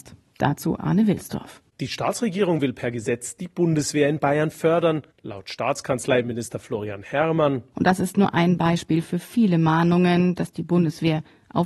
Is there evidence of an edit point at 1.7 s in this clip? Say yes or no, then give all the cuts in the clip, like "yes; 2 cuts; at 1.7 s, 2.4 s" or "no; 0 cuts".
no; 1 cut; at 7.7 s